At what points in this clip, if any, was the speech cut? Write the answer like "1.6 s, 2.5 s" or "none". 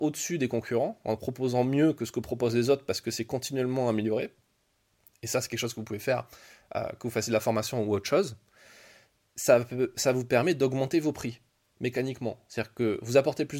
9.3 s